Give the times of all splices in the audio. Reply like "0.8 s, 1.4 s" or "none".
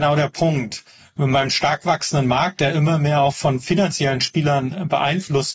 none

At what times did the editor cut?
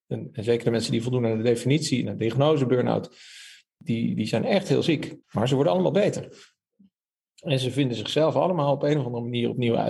5.2 s

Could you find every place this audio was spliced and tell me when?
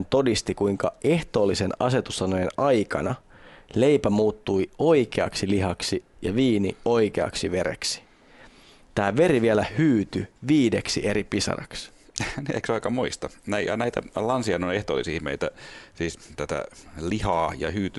10.4 s

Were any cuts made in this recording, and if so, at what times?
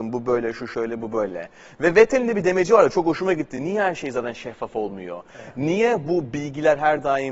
none

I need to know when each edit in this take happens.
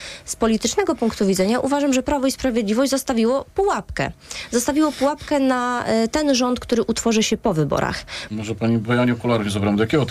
8.3 s

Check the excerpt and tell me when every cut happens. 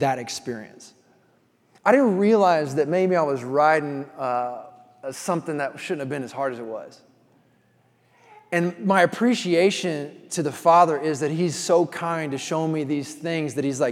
none

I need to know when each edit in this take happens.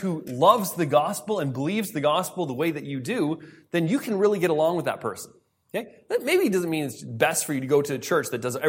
none

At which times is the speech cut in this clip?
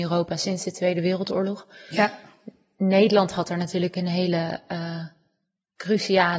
none

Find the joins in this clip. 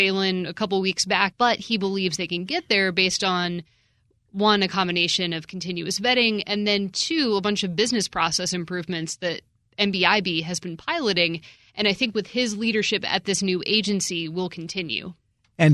1.3 s

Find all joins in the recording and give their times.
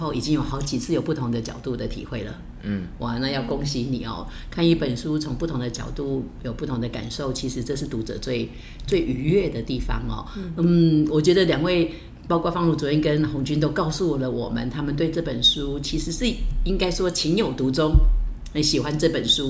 none

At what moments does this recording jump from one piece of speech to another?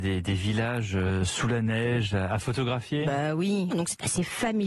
3.7 s

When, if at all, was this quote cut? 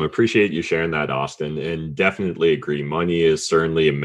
none

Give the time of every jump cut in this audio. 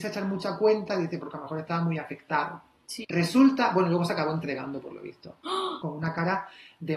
3.0 s, 5.8 s

